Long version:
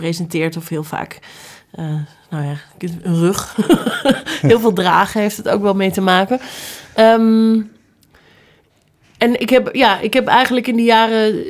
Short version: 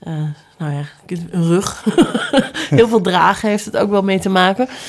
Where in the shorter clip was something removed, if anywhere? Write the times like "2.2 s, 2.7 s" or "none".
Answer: none